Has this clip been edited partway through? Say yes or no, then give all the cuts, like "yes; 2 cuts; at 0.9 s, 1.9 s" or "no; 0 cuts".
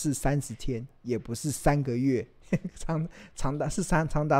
no; 0 cuts